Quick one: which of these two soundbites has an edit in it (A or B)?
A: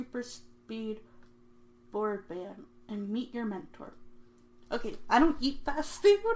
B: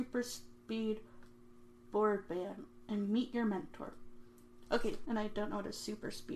B